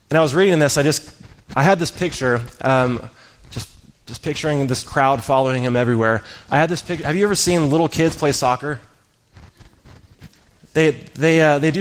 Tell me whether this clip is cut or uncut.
uncut